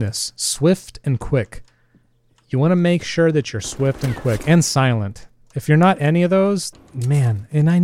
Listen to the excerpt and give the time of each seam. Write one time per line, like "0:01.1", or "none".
0:06.7